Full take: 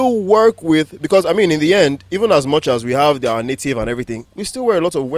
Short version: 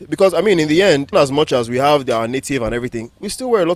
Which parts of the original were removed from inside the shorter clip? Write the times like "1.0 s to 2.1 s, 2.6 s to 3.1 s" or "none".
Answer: 2.0 s to 2.3 s

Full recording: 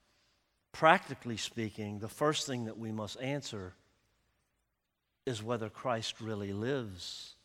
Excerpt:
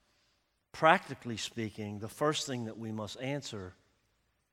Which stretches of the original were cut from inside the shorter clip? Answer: none

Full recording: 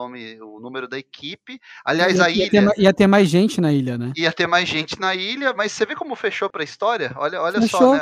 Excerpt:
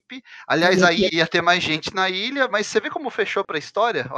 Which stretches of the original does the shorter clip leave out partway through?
2.5 s to 4.1 s

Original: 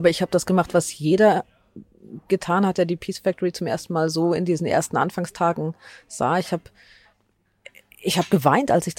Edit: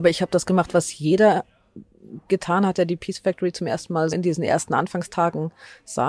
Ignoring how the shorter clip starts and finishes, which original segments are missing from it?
4.1 s to 4.3 s

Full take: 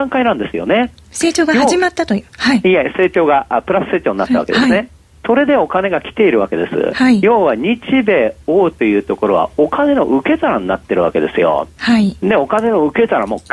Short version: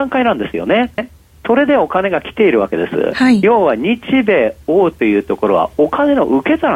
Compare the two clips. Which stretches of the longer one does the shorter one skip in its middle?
1.0 s to 4.8 s

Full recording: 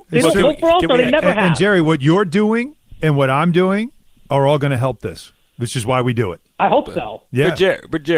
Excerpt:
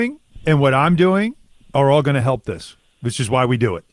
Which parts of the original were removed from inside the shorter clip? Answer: none

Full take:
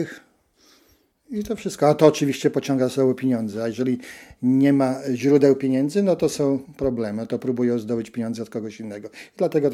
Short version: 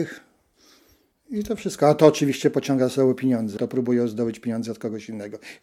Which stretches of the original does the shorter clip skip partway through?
3.6 s to 7.3 s

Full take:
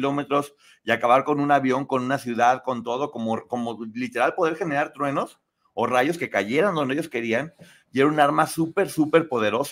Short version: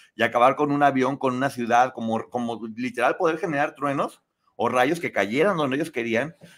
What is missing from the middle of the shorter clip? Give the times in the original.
2.6 s to 3.1 s

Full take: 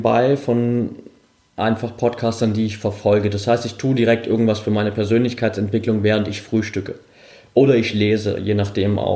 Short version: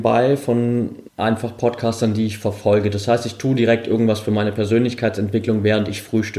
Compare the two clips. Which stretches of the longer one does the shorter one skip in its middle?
1.1 s to 1.5 s

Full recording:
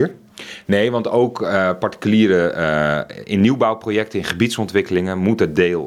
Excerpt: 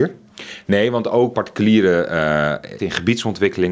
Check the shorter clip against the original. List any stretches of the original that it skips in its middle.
1.3 s to 1.8 s, 3.2 s to 4.1 s

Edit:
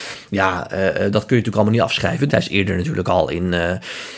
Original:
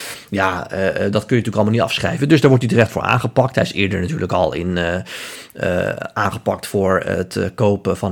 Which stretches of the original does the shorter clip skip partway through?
2.3 s to 3.5 s

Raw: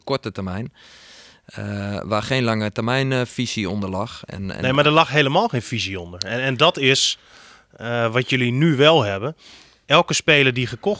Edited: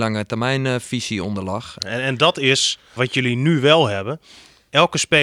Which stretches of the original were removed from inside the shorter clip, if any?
4.3 s to 6.2 s, 7.4 s to 8.1 s

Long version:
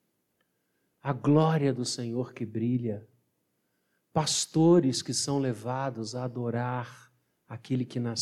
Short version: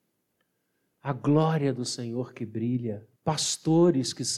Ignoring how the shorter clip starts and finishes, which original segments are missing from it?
3.2 s to 4.1 s

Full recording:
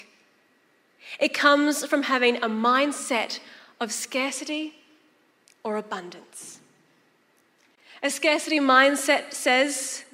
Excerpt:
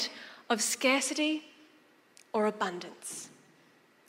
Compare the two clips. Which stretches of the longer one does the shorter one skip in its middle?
none

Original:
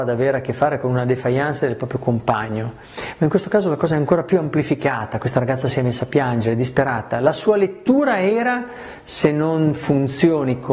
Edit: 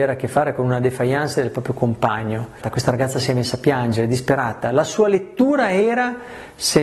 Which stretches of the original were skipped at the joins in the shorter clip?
2.9 s to 5.1 s

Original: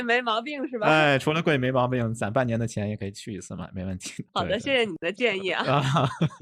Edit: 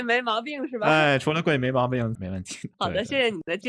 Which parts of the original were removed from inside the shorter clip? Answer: 2.2 s to 3.7 s

